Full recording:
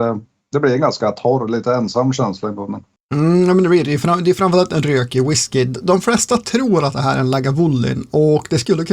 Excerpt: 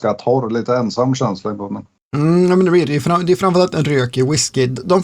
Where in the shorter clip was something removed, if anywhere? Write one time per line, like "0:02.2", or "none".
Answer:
none